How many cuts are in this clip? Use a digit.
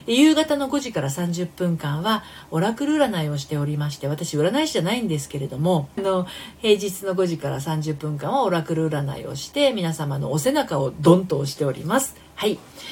1